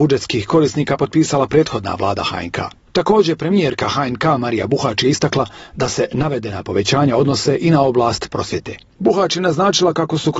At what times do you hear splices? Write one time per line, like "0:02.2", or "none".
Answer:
0:08.9